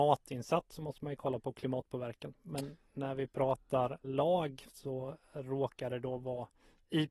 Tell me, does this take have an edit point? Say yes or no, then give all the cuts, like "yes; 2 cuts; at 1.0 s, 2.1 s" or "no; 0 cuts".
yes; 1 cut; at 4.0 s